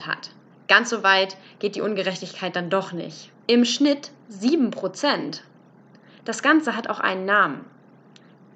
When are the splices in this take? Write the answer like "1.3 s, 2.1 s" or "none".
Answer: 3.4 s